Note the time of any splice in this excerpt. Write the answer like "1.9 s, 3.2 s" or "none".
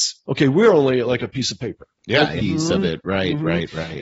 2.4 s